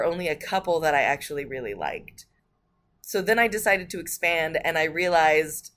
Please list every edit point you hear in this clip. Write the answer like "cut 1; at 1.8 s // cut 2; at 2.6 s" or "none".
none

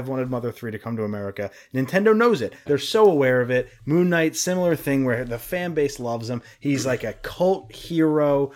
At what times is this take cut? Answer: cut 1; at 2.7 s

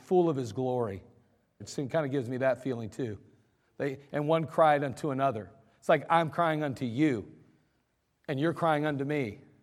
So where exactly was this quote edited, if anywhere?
cut 1; at 1.6 s

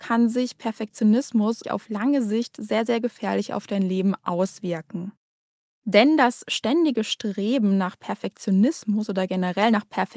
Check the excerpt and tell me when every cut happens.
cut 1; at 1.6 s // cut 2; at 5.6 s

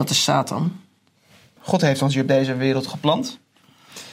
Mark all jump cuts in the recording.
cut 1; at 1.6 s

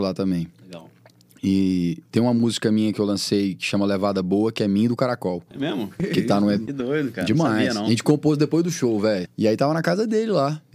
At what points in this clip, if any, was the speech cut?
cut 1; at 6.7 s // cut 2; at 9.2 s

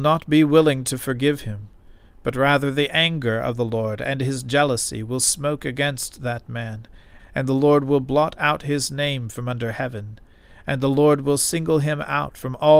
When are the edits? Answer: cut 1; at 7.2 s

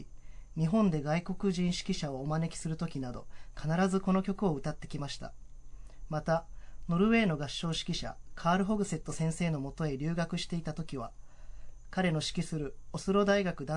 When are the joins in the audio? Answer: none

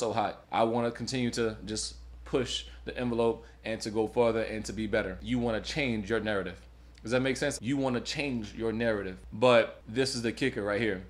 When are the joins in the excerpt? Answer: cut 1; at 7.6 s // cut 2; at 9.3 s

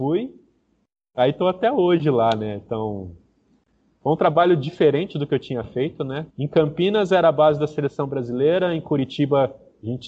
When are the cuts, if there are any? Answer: cut 1; at 6.3 s

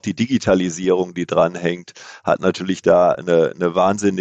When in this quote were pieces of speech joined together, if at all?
none

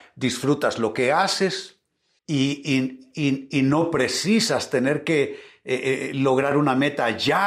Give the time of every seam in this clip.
cut 1; at 2.2 s

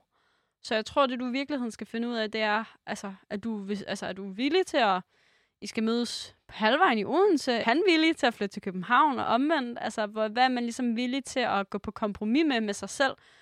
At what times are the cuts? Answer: cut 1; at 7.6 s

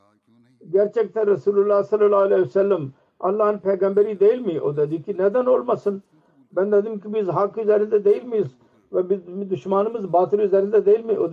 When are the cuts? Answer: none

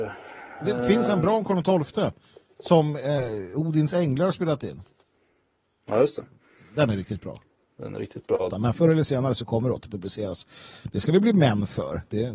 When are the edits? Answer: cut 1; at 8.5 s

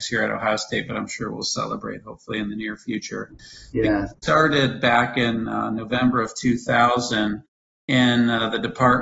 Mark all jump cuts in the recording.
none

